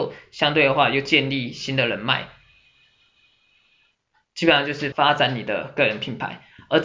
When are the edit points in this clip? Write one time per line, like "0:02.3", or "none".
0:04.9